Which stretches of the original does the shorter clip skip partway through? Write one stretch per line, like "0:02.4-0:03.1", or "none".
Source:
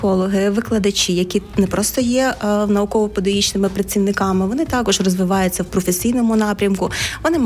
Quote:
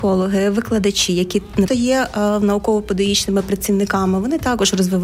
0:01.7-0:01.9